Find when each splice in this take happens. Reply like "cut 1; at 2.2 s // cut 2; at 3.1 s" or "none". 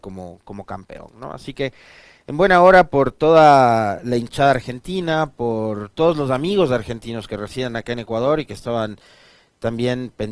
none